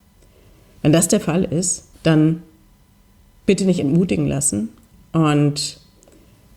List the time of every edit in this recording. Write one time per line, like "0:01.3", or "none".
0:01.9